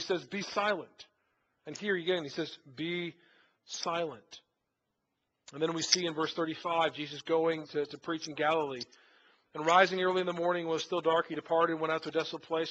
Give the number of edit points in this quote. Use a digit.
0